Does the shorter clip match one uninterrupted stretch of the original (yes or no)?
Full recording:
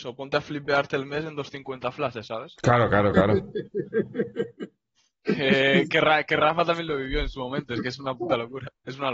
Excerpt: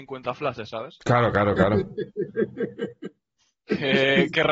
yes